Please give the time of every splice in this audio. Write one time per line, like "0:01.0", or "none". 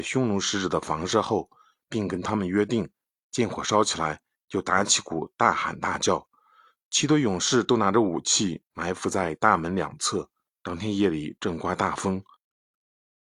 0:10.5

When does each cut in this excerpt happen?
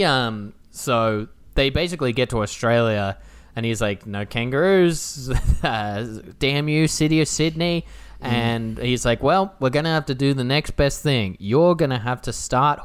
none

